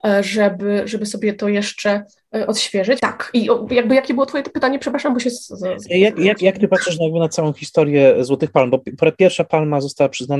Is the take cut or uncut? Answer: cut